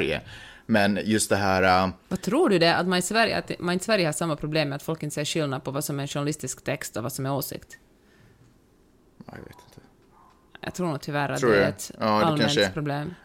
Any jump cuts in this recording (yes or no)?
no